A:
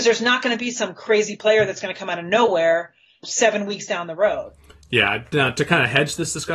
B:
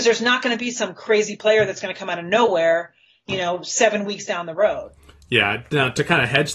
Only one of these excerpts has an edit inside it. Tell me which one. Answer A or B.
A